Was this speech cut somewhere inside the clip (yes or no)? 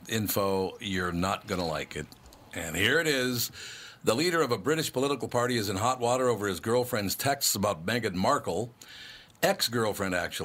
no